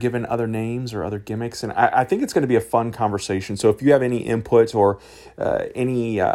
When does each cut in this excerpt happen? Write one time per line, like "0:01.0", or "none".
none